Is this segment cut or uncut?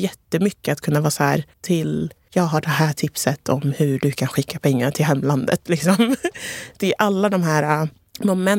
cut